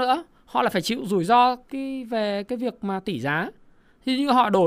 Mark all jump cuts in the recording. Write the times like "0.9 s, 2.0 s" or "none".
1.7 s